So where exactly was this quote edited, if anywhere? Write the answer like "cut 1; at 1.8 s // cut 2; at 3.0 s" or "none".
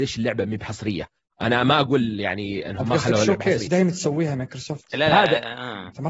cut 1; at 3.7 s